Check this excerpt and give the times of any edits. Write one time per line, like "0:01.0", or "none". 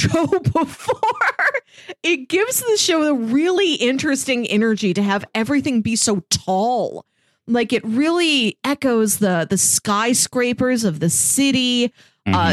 none